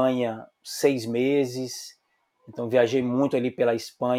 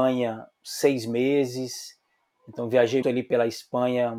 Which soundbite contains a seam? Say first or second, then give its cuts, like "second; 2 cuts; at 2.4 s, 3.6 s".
second; 1 cut; at 3.0 s